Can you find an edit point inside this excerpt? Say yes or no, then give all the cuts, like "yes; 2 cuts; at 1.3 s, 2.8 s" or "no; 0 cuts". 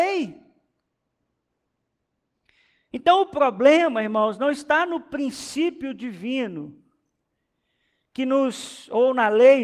no; 0 cuts